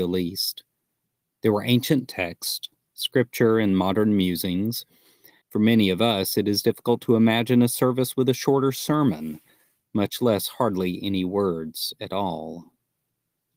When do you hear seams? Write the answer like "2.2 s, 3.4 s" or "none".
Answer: 5.4 s